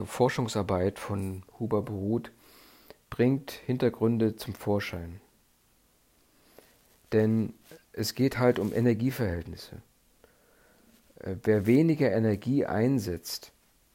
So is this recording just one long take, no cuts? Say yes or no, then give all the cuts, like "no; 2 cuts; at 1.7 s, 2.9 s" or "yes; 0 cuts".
yes; 0 cuts